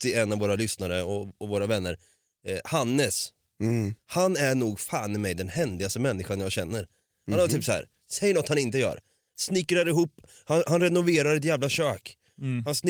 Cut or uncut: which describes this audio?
uncut